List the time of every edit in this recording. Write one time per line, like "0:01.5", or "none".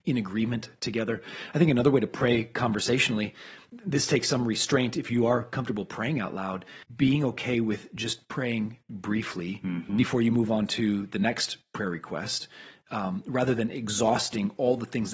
0:06.8
0:09.9